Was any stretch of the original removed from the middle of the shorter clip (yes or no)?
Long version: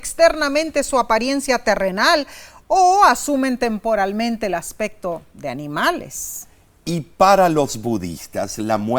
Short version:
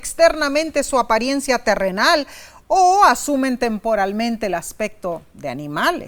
no